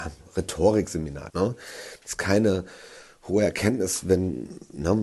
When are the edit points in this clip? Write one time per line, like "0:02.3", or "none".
0:01.3